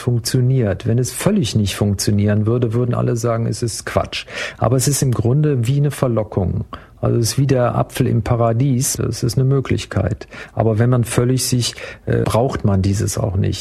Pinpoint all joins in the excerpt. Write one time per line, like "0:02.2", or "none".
0:09.0
0:12.2